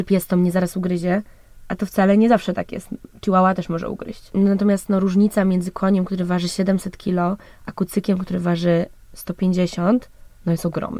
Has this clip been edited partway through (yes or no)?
no